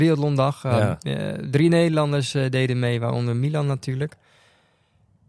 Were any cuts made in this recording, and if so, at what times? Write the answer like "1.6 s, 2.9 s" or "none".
none